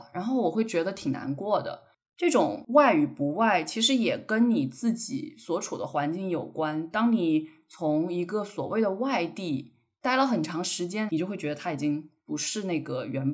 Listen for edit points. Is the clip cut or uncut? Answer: cut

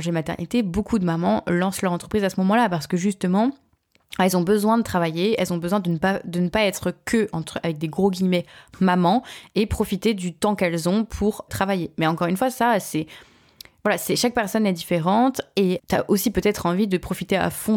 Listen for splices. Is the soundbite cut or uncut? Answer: cut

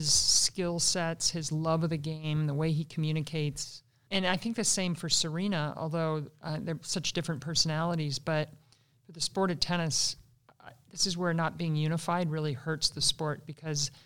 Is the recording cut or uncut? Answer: uncut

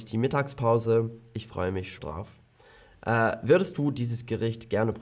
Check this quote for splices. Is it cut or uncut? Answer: cut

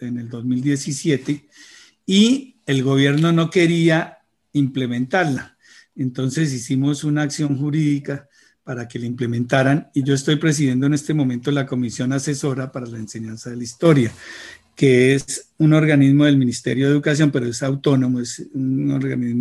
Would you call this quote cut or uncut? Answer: uncut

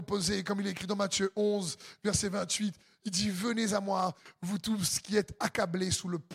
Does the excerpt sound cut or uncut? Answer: uncut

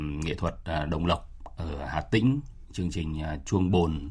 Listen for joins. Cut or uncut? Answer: uncut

